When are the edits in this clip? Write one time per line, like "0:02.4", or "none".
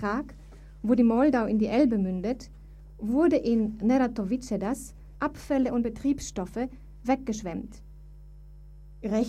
0:05.2